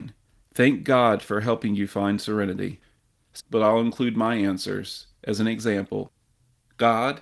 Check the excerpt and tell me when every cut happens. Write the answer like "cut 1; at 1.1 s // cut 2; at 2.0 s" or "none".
cut 1; at 3.4 s